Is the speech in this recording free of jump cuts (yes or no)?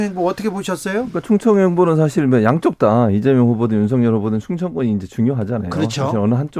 yes